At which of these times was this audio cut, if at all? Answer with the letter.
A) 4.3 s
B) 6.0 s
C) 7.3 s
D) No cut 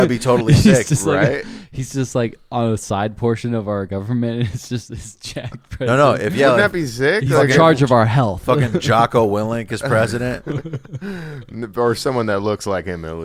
D